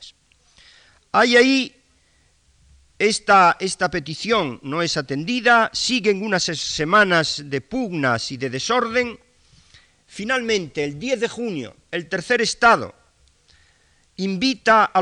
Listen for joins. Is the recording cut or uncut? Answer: uncut